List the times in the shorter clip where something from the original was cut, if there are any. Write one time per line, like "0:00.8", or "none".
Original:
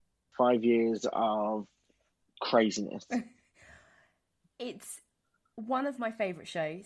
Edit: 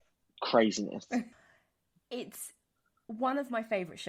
0:01.3